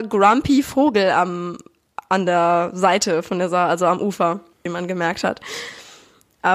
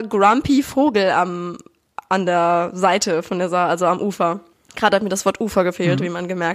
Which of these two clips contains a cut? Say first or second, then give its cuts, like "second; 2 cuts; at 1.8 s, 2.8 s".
first; 1 cut; at 4.7 s